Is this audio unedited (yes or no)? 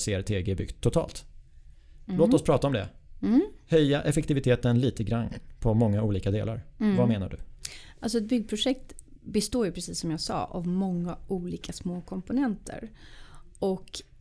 yes